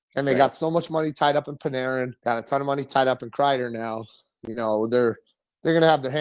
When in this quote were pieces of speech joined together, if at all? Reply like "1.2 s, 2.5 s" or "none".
2.2 s